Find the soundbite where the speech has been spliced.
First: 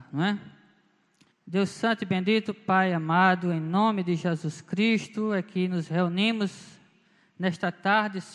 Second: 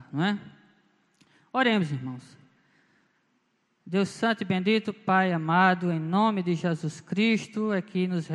first; 1 cut; at 1.3 s

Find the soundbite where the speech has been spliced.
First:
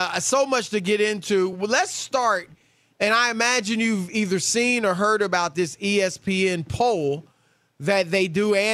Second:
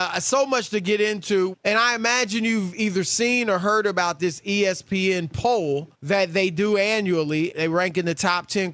second; 3 cuts; at 1.5 s, 5.9 s, 7.5 s

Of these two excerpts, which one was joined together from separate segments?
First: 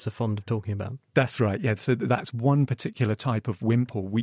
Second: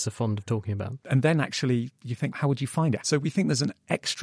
second; 2 cuts; at 1.0 s, 3.0 s

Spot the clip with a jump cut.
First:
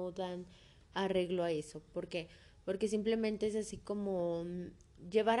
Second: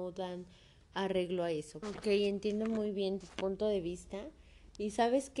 second; 2 cuts; at 1.8 s, 3.2 s

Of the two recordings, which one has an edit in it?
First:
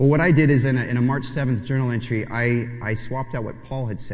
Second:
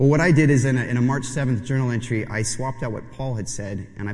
second; 1 cut; at 2.3 s

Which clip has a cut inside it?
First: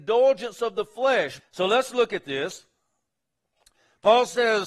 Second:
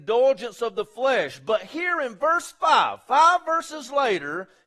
first; 1 cut; at 1.4 s

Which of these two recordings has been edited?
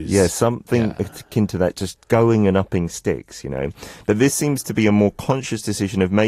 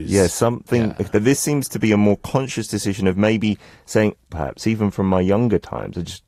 second; 2 cuts; at 1.1 s, 4.3 s

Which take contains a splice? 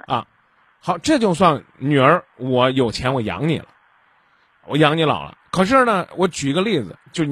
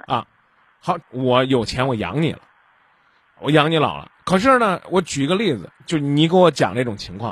second; 1 cut; at 1.0 s

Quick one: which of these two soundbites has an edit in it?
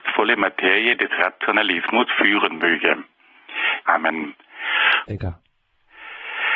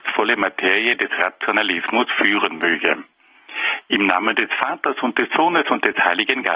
first; 2 cuts; at 3.8 s, 5.1 s

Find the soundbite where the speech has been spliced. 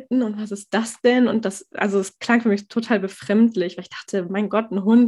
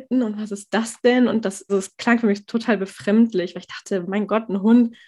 second; 1 cut; at 1.7 s

